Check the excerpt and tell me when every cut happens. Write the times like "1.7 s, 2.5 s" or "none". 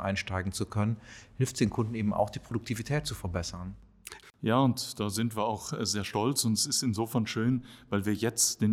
4.2 s